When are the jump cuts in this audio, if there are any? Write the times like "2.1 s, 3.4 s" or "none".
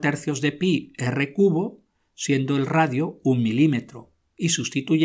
none